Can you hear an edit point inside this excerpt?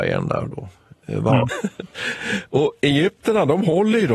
yes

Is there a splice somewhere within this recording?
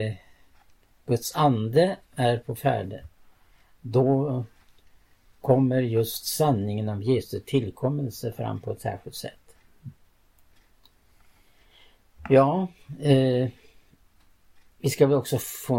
no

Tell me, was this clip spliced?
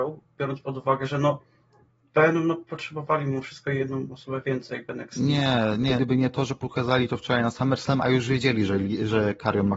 yes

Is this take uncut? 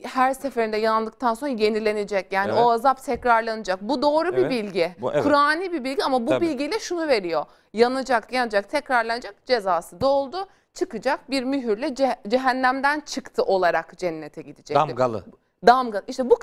no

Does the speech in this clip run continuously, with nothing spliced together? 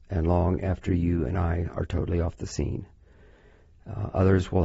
yes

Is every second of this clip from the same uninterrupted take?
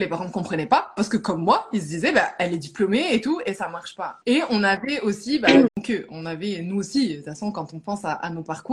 no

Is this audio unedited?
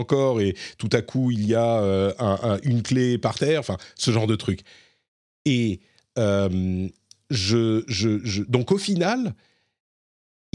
yes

